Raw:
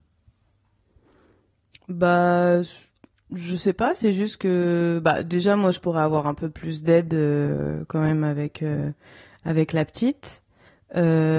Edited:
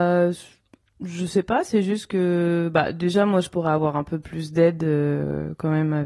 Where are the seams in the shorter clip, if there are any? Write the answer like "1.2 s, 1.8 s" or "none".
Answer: none